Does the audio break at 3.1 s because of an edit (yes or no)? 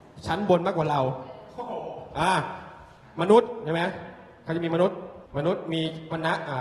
no